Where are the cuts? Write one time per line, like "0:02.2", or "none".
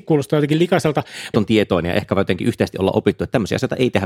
0:01.3